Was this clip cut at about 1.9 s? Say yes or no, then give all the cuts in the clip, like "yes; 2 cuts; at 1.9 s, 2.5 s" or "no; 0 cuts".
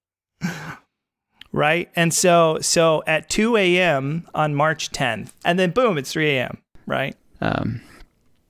no; 2 cuts; at 5.4 s, 7.3 s